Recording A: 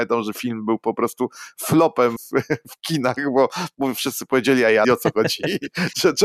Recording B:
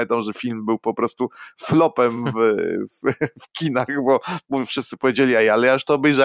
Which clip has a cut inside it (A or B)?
A